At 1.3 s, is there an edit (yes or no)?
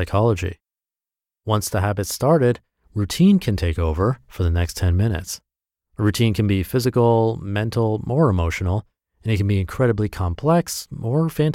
no